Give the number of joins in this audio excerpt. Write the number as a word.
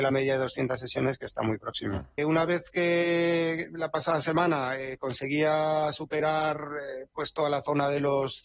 one